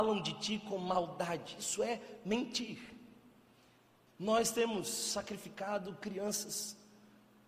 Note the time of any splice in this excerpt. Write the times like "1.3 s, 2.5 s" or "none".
4.1 s